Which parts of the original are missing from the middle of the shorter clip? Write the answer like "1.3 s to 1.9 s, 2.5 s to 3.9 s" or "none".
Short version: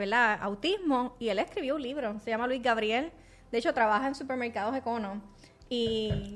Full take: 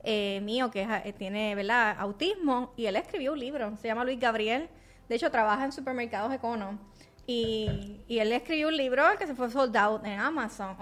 none